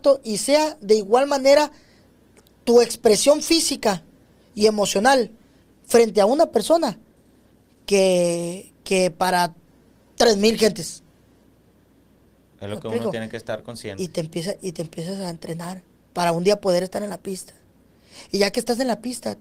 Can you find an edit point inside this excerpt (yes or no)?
no